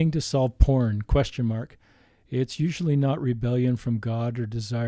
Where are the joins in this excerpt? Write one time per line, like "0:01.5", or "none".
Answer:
none

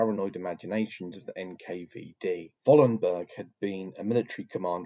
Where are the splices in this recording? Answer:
0:02.6

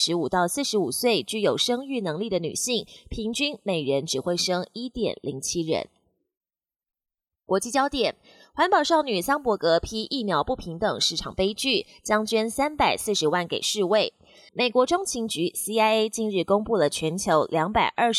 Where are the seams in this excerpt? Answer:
0:14.5

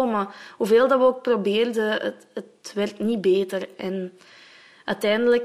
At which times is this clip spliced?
none

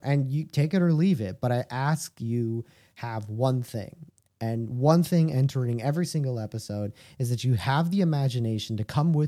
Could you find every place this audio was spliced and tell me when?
none

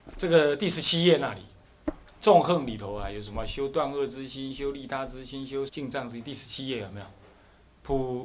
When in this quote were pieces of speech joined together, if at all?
0:05.7

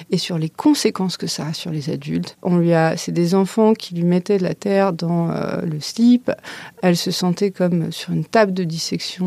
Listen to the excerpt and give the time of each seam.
0:02.4

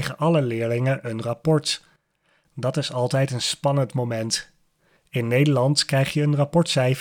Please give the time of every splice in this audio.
0:05.0

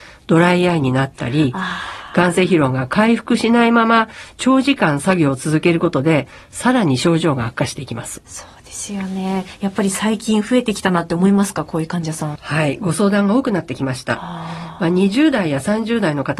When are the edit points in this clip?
0:12.4

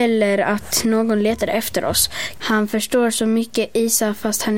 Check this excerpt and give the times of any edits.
0:02.4

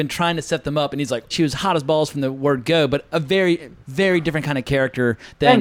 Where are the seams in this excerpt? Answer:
0:01.3

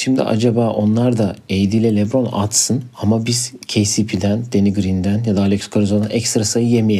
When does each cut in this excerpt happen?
0:02.9

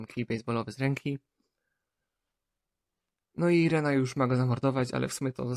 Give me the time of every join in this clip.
none

